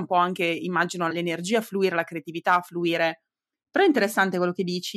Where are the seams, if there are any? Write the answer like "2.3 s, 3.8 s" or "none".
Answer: 1.1 s